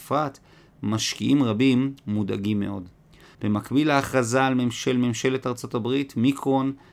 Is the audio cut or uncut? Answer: cut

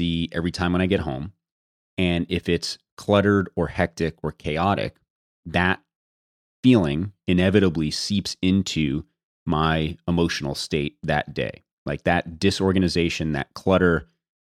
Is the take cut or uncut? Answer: uncut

